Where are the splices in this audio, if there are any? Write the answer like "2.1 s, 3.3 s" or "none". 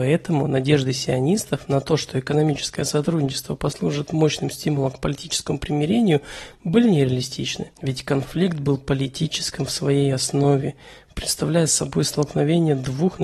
7.7 s

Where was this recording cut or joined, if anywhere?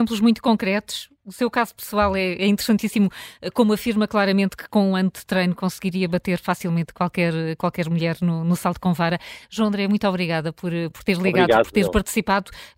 none

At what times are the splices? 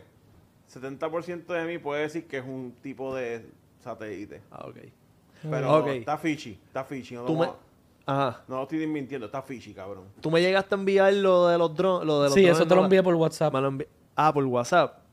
none

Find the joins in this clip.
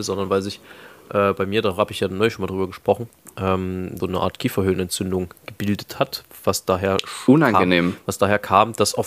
4.0 s

